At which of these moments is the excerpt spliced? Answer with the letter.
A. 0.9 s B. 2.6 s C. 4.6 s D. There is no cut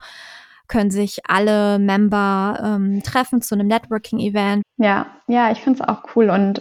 C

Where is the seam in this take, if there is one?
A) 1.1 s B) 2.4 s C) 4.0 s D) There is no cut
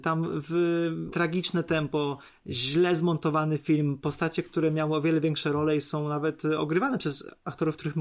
A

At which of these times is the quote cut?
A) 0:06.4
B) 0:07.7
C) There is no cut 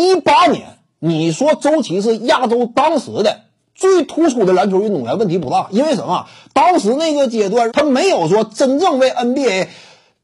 B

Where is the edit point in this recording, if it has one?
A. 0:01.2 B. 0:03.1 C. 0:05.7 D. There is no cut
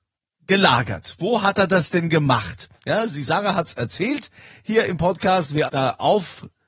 C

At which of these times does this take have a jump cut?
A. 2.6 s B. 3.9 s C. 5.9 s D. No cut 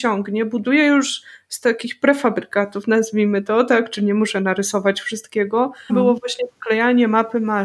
C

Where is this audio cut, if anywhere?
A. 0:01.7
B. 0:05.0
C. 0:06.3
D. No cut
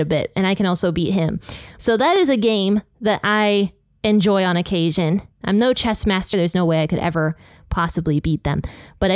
C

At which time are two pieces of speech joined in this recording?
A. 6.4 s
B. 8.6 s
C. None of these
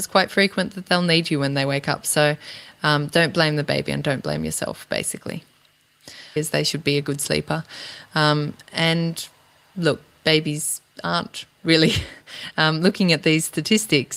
A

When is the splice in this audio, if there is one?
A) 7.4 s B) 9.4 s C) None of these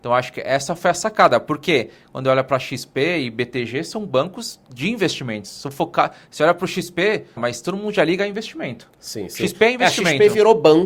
A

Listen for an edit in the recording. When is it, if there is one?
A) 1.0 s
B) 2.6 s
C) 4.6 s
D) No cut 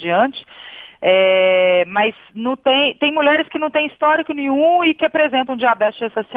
D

